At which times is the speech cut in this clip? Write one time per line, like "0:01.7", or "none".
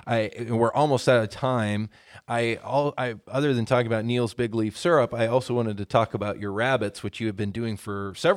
none